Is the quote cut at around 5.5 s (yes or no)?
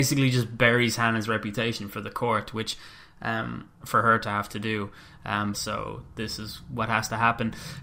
yes